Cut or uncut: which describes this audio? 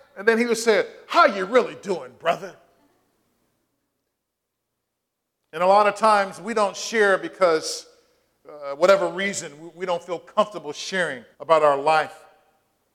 cut